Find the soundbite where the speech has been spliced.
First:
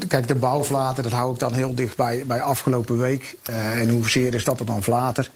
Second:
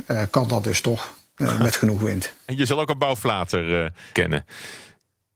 second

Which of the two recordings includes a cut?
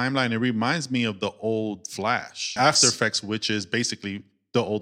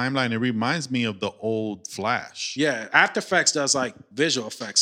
first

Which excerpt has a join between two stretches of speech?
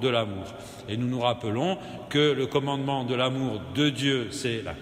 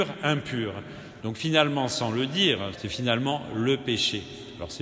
second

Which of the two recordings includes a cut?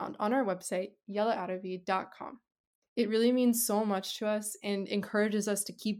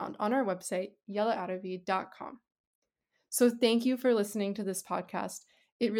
first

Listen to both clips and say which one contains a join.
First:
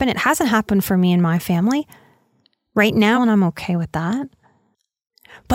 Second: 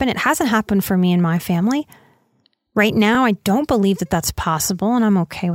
first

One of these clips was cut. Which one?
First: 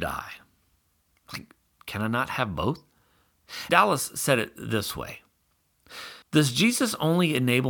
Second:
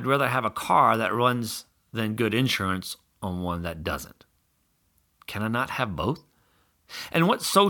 first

